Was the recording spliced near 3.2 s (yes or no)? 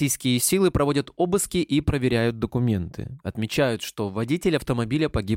yes